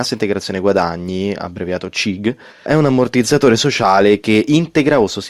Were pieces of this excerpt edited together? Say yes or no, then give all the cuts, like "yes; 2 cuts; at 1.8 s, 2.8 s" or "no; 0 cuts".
yes; 1 cut; at 2.7 s